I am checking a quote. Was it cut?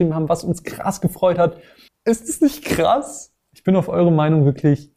yes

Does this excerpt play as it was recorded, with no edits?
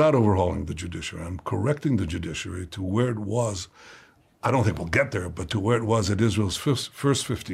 yes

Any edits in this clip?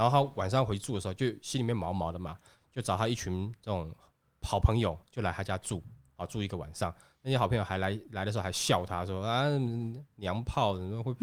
no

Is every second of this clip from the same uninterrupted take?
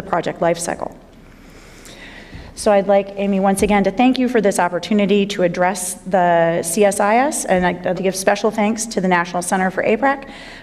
no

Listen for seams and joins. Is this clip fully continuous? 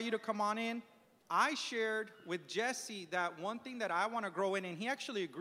yes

